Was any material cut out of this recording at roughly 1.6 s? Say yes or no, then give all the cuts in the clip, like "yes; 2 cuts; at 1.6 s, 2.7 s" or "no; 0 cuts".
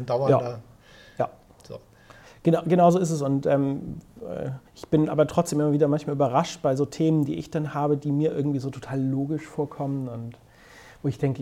no; 1 cut; at 4.7 s